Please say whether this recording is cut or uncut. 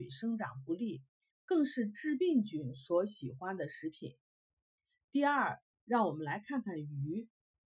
cut